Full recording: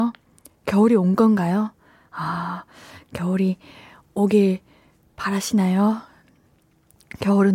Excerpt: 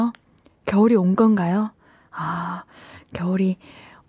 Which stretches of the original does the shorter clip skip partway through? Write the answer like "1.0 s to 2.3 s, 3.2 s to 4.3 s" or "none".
none